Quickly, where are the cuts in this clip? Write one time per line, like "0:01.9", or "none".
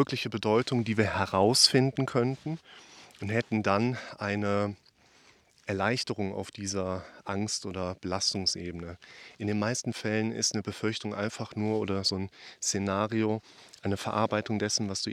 none